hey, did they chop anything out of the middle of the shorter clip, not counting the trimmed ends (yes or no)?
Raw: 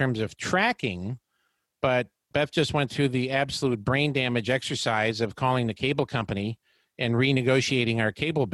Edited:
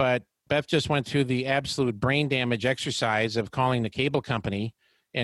no